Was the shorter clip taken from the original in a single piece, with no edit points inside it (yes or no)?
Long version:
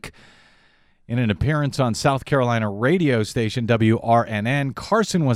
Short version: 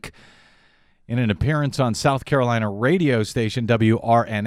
yes